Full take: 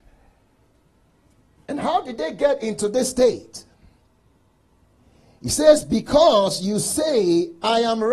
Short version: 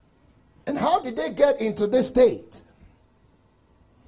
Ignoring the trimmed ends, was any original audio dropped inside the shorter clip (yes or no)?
no